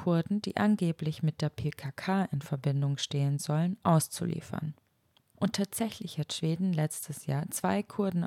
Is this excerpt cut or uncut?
cut